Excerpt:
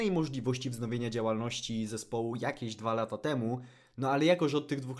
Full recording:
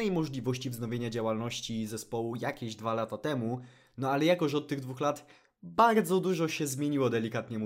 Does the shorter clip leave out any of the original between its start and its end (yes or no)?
no